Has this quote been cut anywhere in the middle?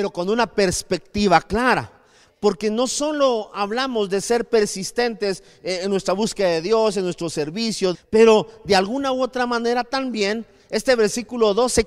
yes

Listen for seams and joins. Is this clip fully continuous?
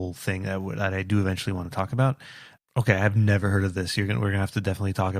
no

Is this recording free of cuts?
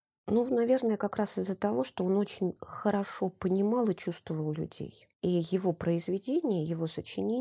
no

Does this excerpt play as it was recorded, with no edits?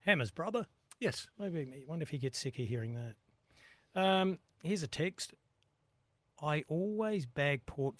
no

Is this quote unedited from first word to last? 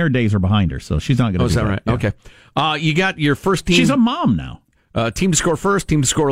yes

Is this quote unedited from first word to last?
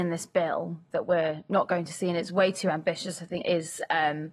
no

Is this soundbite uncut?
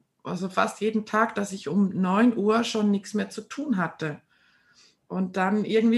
yes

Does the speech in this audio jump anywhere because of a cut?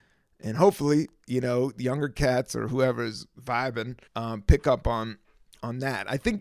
yes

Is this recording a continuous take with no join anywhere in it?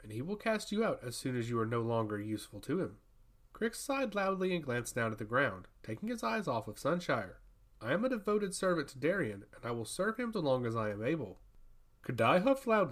no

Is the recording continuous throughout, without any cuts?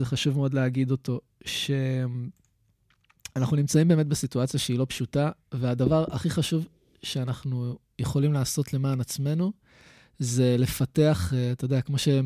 yes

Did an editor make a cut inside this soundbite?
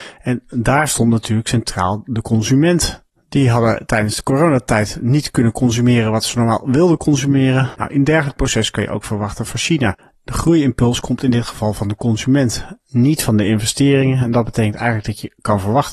yes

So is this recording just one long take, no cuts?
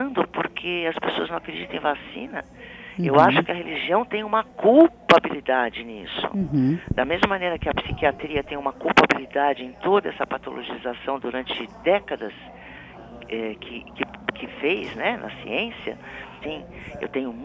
no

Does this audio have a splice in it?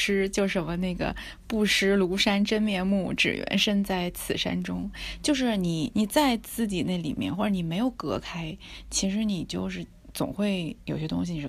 yes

